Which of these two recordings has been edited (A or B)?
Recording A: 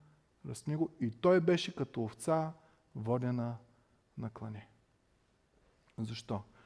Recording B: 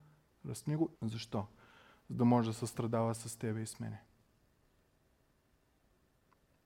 B